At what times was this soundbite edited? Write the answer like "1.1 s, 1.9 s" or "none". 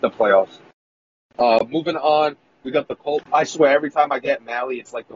3.2 s